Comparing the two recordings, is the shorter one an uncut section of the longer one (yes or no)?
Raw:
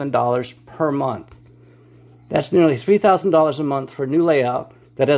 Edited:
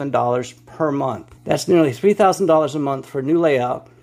no